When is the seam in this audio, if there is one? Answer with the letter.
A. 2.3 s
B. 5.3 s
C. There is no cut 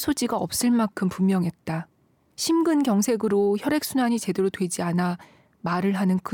A